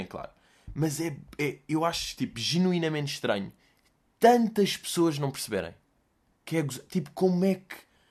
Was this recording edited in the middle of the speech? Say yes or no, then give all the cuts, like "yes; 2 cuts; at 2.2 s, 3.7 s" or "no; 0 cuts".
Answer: no; 0 cuts